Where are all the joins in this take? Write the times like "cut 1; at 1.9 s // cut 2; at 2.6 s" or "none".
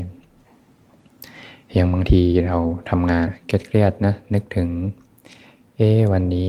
cut 1; at 3.3 s